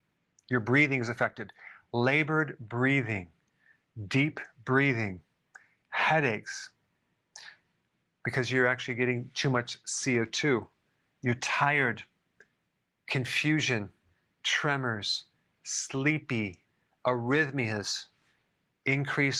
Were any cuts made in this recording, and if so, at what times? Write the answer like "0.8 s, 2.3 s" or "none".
none